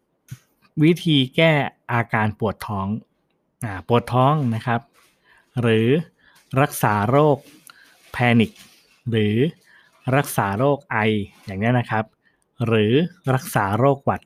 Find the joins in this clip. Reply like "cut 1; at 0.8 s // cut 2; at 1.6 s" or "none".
none